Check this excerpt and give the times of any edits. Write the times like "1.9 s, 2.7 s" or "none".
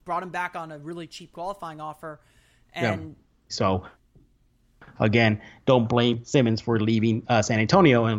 3.5 s